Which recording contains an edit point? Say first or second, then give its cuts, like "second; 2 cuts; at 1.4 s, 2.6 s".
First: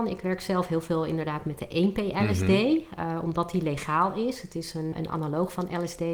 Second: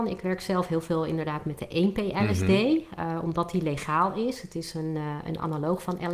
first; 1 cut; at 4.9 s